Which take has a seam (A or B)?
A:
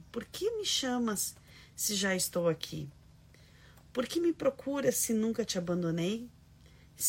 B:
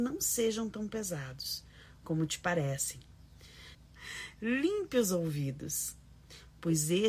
B